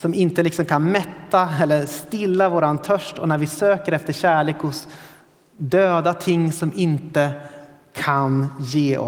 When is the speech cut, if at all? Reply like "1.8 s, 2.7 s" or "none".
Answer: none

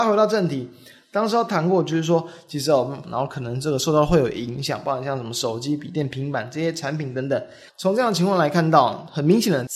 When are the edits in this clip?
3.0 s, 7.7 s

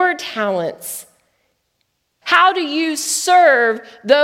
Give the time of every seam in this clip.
2.2 s

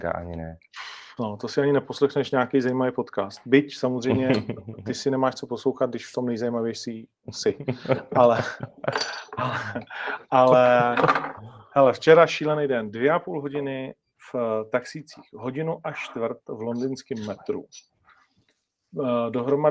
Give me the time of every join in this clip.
none

